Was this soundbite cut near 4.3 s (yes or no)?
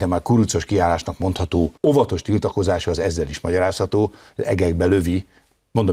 no